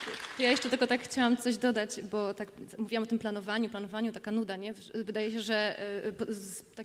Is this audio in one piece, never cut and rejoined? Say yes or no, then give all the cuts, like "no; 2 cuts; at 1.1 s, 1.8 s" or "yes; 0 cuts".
yes; 0 cuts